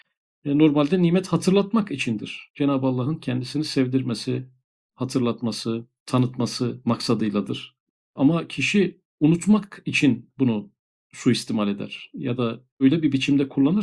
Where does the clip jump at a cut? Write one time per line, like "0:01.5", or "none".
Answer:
none